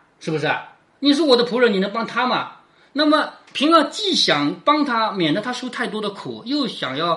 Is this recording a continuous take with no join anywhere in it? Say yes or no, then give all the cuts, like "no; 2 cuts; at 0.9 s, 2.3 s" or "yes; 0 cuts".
yes; 0 cuts